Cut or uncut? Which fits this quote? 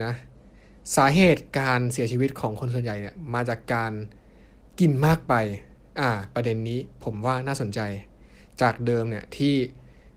uncut